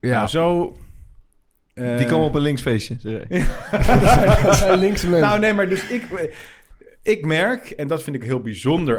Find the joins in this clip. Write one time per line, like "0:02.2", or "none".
none